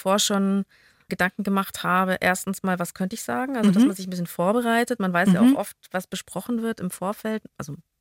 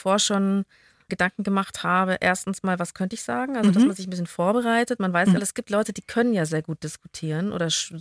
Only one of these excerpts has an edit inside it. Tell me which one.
second; 1 cut; at 5.4 s

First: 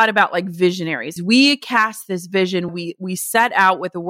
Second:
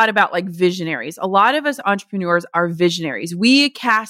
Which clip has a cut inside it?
first; 2 cuts; at 1.2 s, 2.7 s

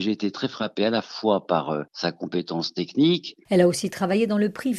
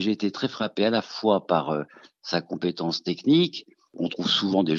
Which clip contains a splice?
first; 2 cuts; at 1.9 s, 3.5 s

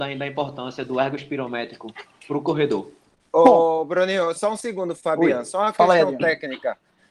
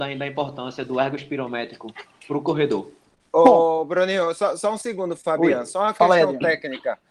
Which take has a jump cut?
first; 1 cut; at 4.4 s

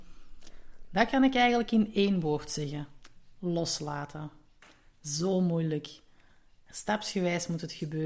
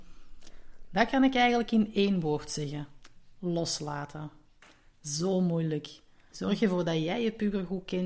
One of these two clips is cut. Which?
second; 1 cut; at 6.3 s

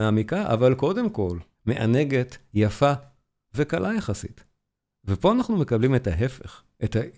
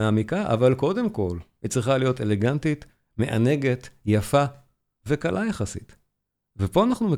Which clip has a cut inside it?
first; 1 cut; at 1.5 s

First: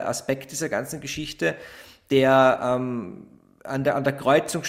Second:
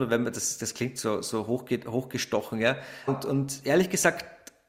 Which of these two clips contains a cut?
second; 1 cut; at 3.1 s

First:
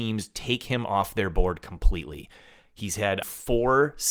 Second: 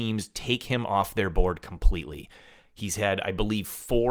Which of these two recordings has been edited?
first; 1 cut; at 3.2 s

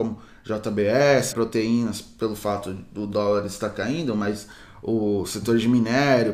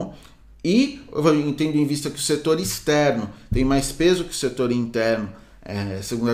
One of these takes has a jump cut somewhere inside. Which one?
first; 1 cut; at 1.3 s

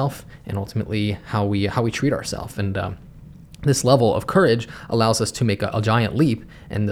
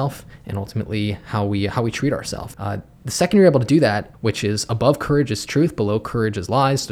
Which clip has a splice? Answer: second; 2 cuts; at 2.5 s, 4.1 s

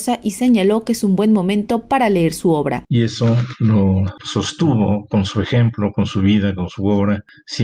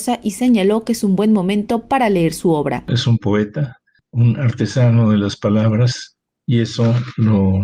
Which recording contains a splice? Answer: first; 1 cut; at 2.8 s

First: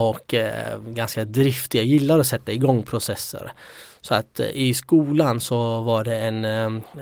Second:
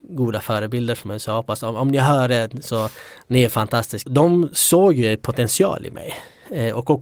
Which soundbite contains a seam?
second; 1 cut; at 4.1 s

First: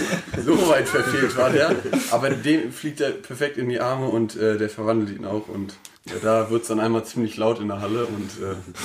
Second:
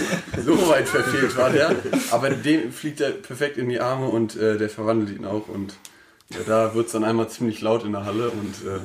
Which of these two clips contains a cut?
first; 1 cut; at 6.0 s

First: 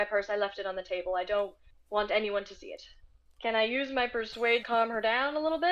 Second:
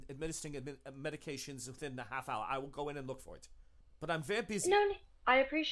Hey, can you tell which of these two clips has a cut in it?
first; 2 cuts; at 3.4 s, 4.6 s

